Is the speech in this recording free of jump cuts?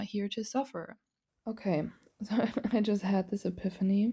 no; 1 cut; at 1.3 s

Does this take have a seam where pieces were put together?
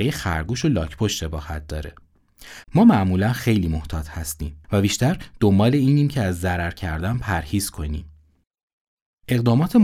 yes; 2 cuts; at 2.6 s, 4.6 s

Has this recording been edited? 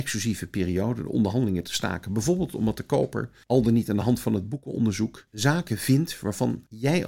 no; 0 cuts

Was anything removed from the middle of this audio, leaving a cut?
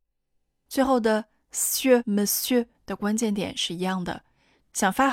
yes; 1 cut; at 2.0 s

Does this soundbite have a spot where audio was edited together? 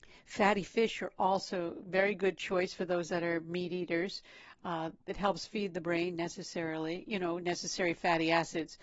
no; 0 cuts

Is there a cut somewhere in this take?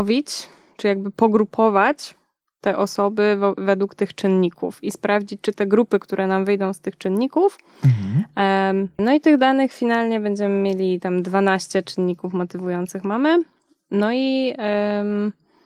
yes; 1 cut; at 9.0 s

